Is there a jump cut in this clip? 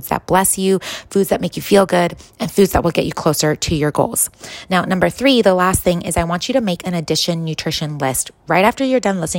no; 0 cuts

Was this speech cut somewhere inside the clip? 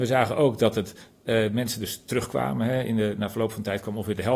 no; 0 cuts

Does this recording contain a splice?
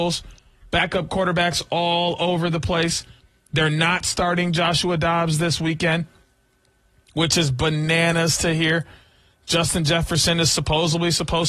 no; 0 cuts

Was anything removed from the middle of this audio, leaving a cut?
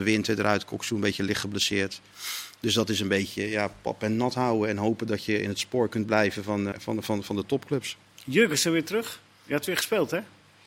yes; 1 cut; at 6.7 s

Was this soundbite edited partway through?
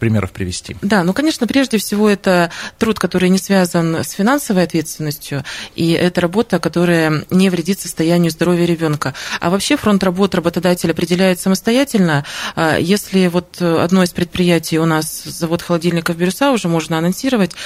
no; 0 cuts

